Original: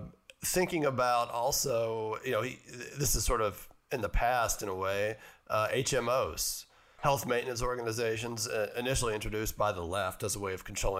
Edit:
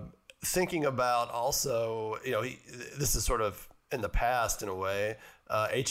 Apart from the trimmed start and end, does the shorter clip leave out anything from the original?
no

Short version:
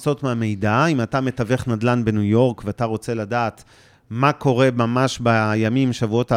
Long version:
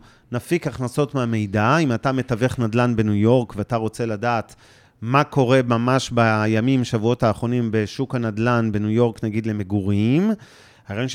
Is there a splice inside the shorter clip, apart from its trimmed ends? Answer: no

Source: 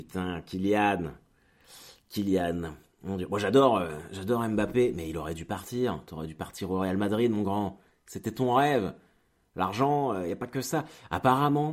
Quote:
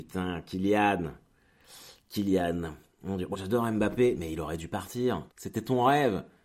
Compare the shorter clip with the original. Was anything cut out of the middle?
yes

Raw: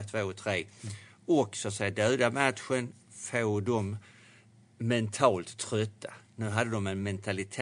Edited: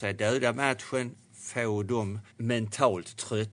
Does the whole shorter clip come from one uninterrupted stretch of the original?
no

